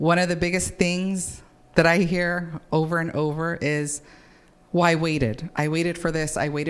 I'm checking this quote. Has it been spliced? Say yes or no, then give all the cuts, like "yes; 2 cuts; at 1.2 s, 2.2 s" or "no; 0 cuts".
no; 0 cuts